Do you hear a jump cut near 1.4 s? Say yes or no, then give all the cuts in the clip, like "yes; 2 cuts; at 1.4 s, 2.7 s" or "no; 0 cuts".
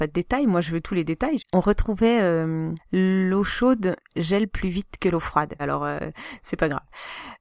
yes; 3 cuts; at 1.4 s, 2.8 s, 5.6 s